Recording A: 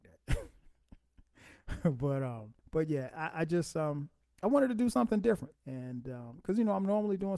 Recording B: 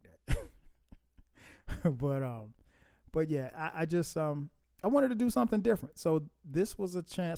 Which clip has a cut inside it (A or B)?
A